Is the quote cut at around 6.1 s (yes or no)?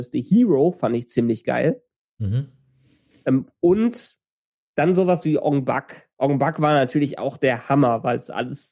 yes